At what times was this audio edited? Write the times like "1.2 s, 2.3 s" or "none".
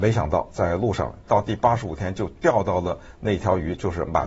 1.3 s